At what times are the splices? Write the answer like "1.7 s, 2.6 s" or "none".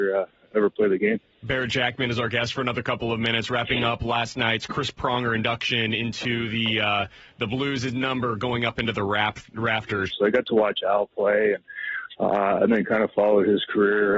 10.1 s